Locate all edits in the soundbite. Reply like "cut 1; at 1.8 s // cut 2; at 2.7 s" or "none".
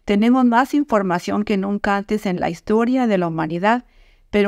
none